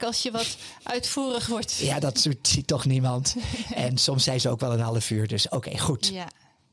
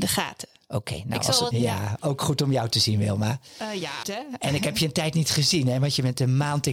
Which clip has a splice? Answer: second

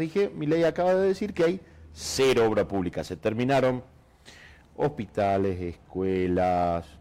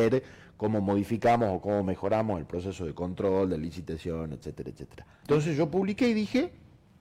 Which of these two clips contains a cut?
second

